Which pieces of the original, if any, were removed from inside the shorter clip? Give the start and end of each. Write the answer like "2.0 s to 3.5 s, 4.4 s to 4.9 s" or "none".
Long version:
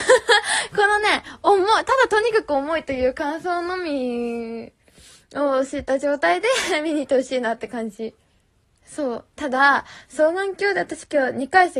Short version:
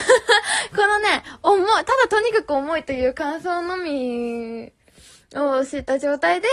none